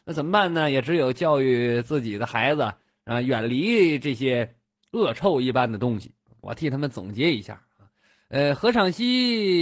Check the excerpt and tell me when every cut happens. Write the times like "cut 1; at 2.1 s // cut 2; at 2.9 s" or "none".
cut 1; at 6.4 s